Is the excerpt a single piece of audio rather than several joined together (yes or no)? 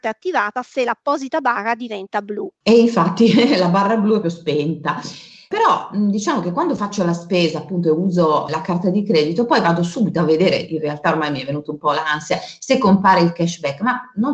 no